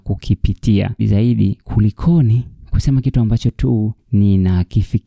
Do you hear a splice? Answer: yes; 1 cut; at 1.0 s

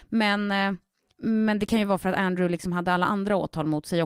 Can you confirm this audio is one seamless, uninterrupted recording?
yes; 0 cuts

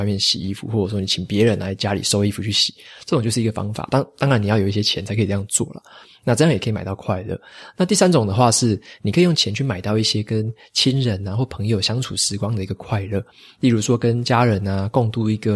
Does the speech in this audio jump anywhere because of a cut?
no; 0 cuts

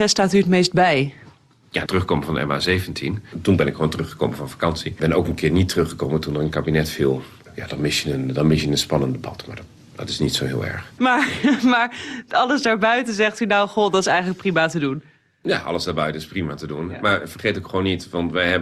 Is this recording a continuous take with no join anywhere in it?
no; 2 cuts; at 1.9 s, 11.0 s

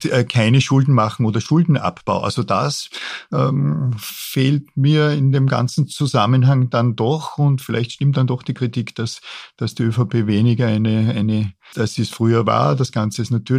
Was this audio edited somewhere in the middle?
yes; 1 cut; at 11.7 s

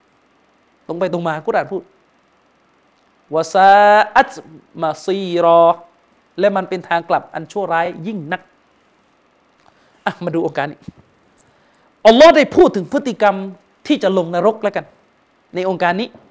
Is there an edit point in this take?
no; 0 cuts

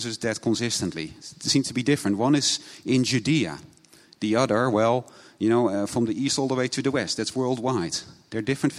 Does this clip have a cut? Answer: no; 0 cuts

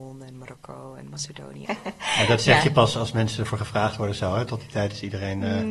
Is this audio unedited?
no; 1 cut; at 1.6 s

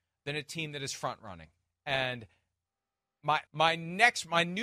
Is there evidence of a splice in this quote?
yes; 2 cuts; at 1.7 s, 3.5 s

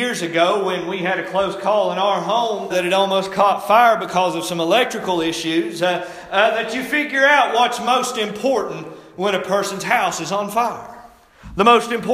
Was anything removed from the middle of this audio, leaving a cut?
yes; 1 cut; at 2.7 s

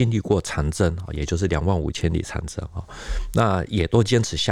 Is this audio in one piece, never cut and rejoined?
yes; 0 cuts

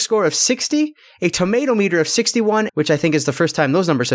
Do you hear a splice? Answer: yes; 1 cut; at 2.7 s

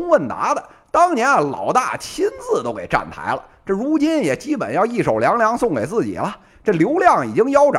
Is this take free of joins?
yes; 0 cuts

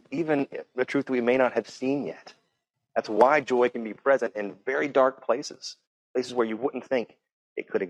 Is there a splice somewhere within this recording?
yes; 1 cut; at 2.7 s

